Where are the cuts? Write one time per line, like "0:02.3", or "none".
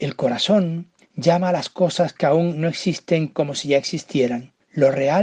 0:01.0